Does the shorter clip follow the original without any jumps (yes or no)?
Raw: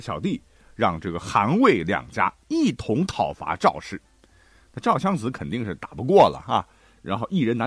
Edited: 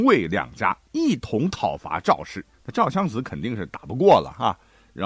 no